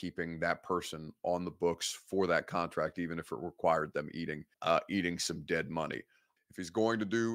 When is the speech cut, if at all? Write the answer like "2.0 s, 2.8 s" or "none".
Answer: 4.5 s, 6.4 s